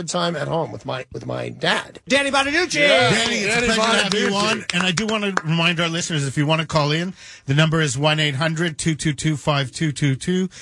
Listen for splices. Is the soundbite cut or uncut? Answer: cut